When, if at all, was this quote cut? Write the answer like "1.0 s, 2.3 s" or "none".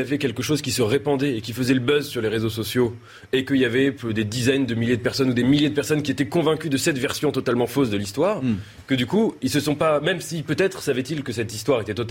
none